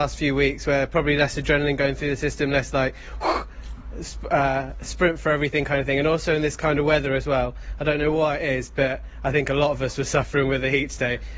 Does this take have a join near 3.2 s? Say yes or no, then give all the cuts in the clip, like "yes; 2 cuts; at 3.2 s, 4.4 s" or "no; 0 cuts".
no; 0 cuts